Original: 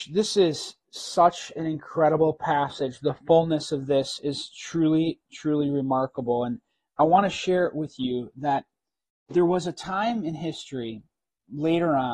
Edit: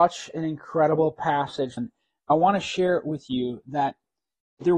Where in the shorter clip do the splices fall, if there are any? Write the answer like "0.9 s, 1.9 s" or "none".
1.8 s